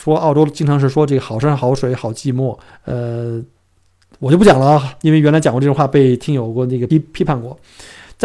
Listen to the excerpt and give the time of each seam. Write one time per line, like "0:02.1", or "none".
0:02.7
0:06.9